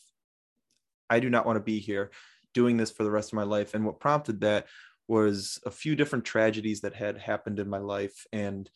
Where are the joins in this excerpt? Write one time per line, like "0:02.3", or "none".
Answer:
none